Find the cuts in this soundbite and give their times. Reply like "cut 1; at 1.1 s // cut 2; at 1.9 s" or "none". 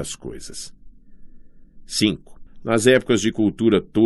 cut 1; at 2.5 s